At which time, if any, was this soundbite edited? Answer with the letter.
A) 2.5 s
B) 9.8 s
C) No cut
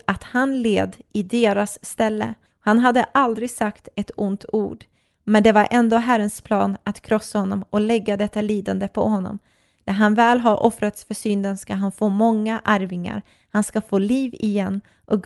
A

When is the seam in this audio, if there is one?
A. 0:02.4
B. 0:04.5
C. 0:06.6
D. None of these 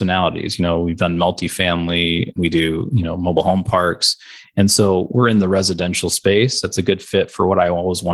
A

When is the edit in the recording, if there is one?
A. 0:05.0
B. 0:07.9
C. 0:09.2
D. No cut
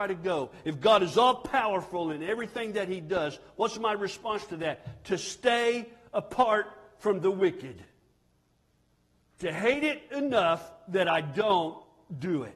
D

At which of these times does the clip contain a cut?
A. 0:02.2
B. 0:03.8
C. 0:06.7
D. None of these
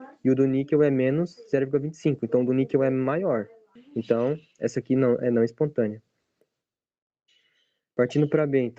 B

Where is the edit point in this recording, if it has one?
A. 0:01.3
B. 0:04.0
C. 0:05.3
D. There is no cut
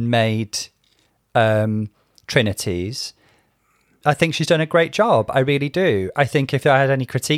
B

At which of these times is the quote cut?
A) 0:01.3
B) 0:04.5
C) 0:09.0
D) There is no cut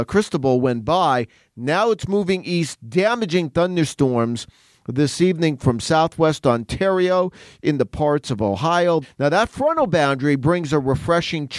C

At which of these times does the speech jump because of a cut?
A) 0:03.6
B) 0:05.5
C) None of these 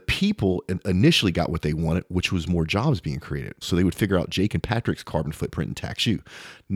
A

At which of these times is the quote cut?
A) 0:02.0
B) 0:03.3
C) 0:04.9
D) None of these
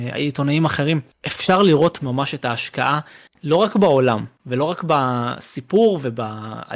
A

